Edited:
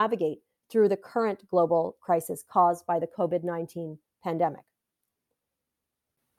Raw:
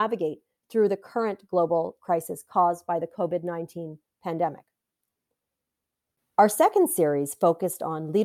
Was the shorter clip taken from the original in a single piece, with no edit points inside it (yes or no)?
yes